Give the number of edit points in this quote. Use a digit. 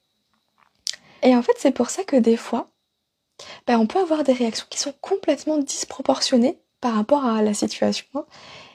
1